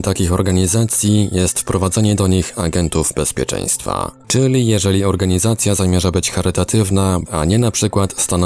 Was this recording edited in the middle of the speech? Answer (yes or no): yes